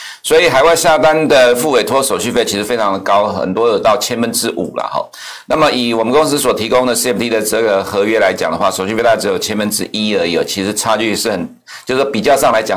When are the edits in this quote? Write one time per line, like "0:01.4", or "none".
none